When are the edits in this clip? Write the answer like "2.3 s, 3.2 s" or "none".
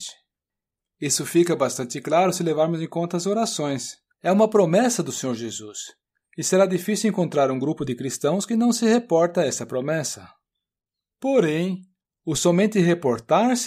4.1 s